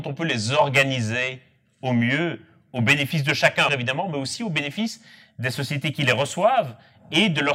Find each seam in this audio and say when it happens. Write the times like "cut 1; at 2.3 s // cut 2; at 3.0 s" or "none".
cut 1; at 3.7 s

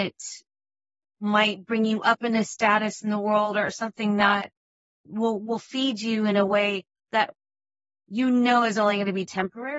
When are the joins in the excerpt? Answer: none

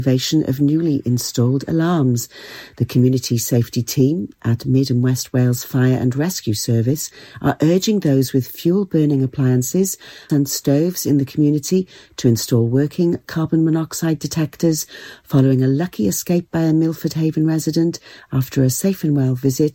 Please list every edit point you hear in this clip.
cut 1; at 10.3 s

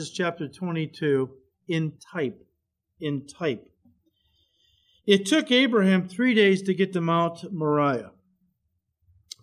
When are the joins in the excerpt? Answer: none

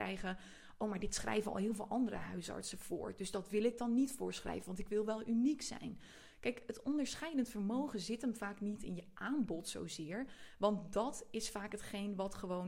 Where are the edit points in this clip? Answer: none

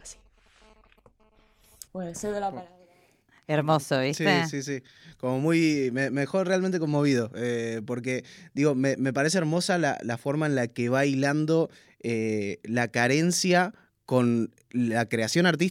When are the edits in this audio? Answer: cut 1; at 1.9 s

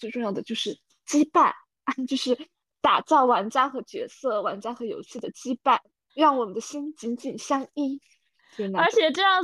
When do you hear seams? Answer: none

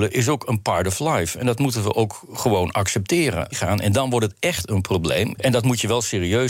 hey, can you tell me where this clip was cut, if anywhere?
cut 1; at 3.5 s // cut 2; at 5.3 s

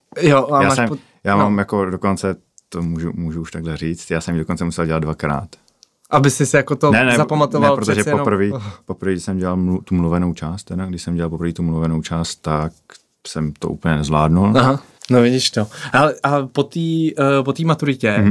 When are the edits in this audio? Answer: cut 1; at 15.0 s

